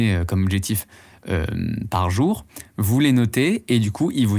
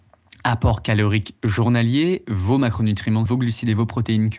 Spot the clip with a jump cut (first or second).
second